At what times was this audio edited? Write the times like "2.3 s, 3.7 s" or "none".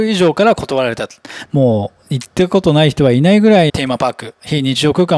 1.5 s, 3.7 s

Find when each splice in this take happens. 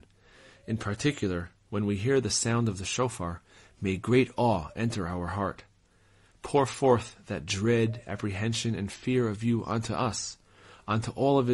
none

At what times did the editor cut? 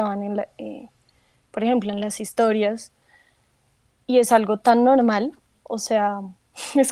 none

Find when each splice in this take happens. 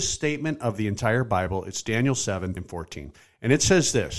2.6 s

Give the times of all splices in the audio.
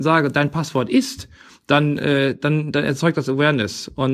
none

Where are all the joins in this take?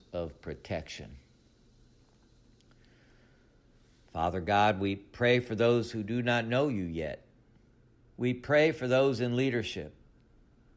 8.0 s

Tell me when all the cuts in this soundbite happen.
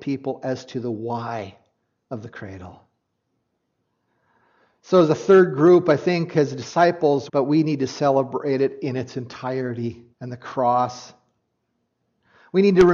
7.3 s, 10.1 s

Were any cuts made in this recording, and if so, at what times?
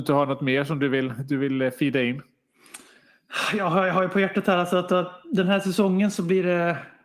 none

